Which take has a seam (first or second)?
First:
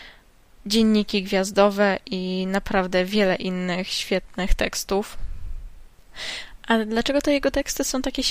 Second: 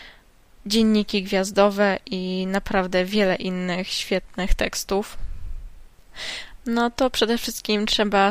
second